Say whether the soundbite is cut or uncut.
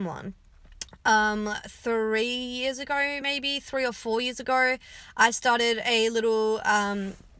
uncut